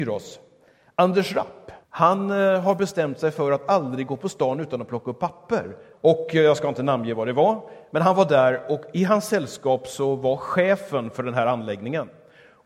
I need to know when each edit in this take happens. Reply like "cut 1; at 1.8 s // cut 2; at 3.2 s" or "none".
cut 1; at 1.8 s // cut 2; at 5.9 s